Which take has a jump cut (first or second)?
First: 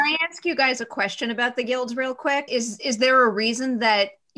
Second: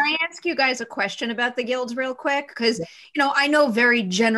first